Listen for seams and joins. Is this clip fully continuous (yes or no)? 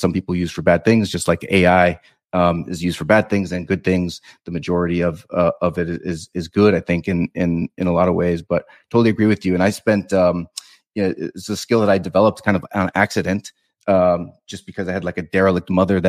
yes